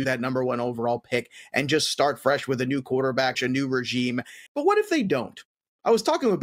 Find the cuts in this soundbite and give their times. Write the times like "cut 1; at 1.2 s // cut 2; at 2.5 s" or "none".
cut 1; at 3.3 s // cut 2; at 4.5 s